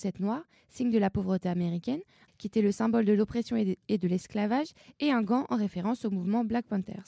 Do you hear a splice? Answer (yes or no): yes